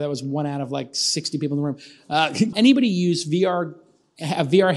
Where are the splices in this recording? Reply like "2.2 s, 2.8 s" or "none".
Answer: 2.5 s